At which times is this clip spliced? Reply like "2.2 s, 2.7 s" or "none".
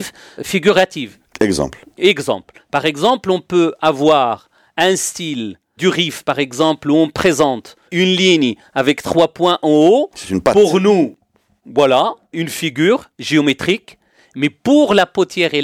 11.6 s